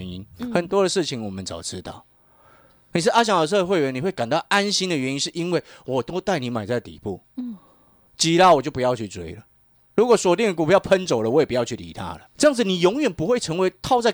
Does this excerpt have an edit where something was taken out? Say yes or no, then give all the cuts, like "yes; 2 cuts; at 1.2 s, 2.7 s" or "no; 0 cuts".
yes; 1 cut; at 12.3 s